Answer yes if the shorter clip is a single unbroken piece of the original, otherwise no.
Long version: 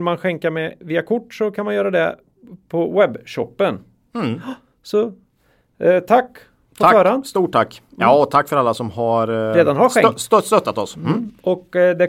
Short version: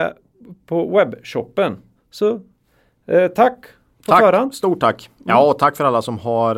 no